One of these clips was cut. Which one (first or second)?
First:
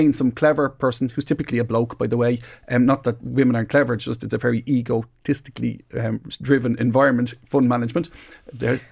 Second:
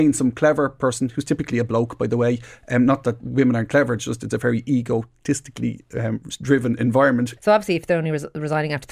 second